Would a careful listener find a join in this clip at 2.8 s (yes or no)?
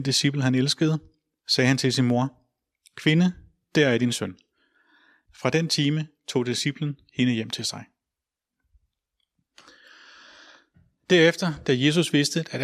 no